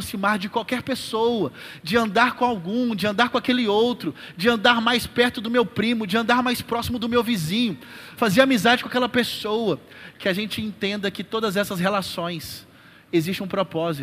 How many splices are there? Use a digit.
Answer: 1